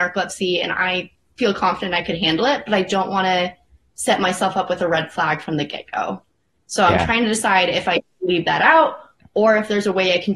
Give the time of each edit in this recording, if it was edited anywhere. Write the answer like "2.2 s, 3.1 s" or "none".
none